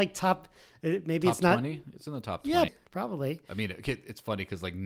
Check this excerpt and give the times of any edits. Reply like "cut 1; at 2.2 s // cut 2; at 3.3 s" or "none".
cut 1; at 2.7 s